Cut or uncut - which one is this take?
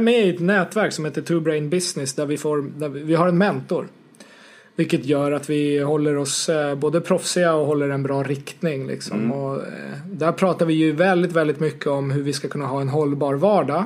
uncut